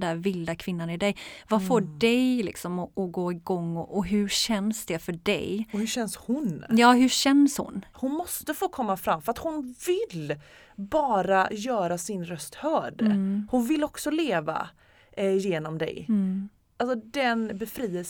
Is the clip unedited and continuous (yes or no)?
no